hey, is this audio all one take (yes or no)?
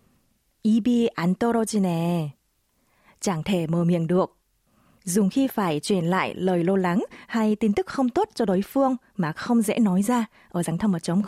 yes